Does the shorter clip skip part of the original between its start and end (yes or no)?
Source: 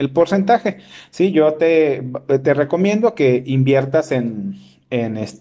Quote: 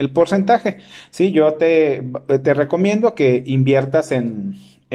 no